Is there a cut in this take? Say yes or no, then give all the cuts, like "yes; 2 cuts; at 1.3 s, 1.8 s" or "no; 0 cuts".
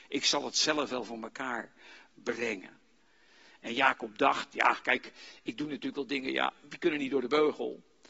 no; 0 cuts